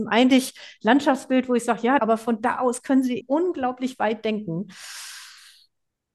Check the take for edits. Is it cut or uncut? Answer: cut